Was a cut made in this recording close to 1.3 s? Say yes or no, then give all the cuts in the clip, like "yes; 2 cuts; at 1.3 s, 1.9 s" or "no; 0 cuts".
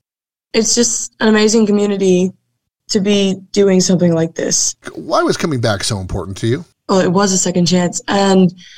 no; 2 cuts; at 4.8 s, 6.7 s